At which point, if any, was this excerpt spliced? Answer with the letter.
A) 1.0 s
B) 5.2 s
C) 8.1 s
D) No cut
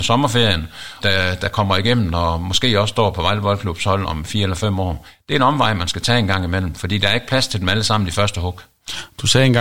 A